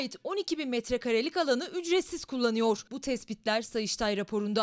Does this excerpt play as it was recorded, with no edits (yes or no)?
no